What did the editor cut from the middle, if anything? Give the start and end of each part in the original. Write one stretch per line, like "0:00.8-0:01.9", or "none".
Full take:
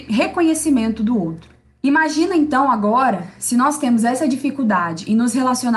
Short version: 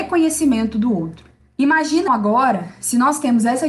0:02.3-0:02.7